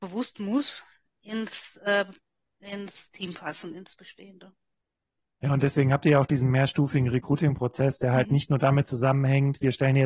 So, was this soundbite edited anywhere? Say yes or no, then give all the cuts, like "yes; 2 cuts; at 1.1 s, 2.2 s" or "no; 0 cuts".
no; 0 cuts